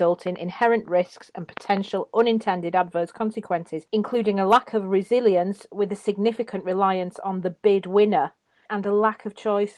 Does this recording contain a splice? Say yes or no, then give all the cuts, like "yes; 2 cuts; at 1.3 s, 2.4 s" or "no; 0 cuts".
yes; 1 cut; at 8.7 s